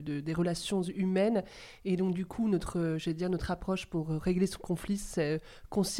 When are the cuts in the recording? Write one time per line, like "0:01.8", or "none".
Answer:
none